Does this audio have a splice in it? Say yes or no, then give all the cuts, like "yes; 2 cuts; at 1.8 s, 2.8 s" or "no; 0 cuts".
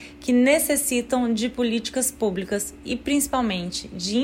no; 0 cuts